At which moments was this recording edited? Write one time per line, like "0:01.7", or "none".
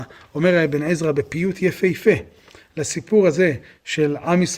none

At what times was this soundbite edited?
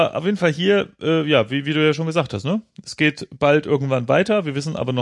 none

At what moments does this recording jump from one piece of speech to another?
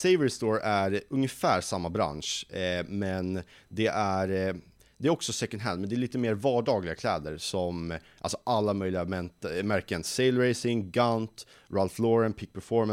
none

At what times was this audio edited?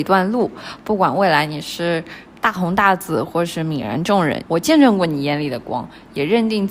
0:04.4

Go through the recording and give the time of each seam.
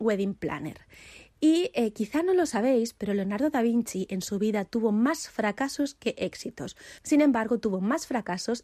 0:07.0

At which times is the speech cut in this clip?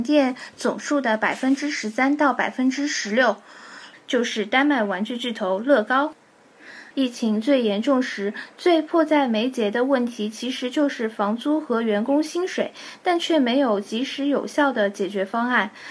0:03.9
0:06.9

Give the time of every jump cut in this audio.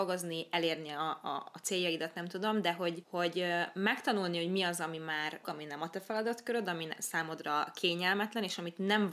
0:03.0
0:05.4

